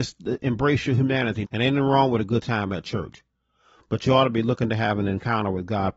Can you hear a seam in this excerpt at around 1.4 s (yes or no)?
yes